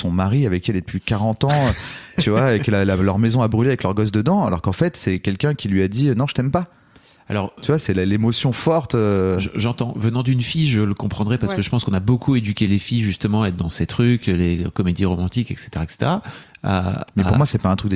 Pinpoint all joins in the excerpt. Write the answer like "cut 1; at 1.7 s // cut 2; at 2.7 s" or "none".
cut 1; at 16.5 s